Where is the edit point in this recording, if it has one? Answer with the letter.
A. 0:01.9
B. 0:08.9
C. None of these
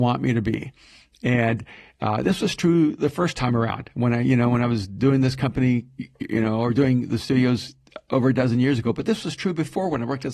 C